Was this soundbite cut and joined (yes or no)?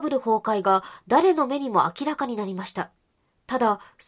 no